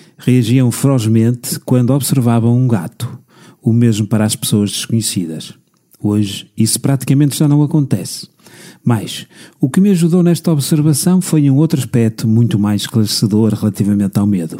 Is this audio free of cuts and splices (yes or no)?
yes